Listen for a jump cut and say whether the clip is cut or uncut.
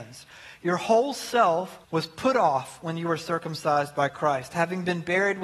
cut